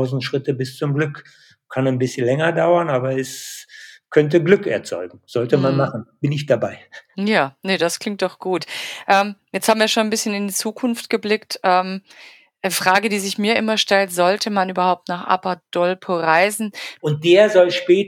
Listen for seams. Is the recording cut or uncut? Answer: cut